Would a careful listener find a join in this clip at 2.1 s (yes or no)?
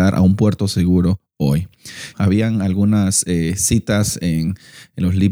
yes